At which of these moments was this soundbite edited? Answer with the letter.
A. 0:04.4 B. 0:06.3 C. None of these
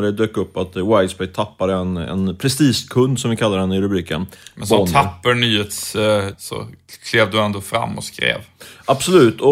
B